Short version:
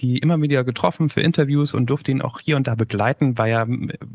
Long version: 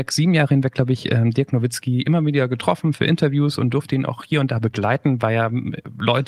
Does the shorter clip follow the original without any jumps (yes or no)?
yes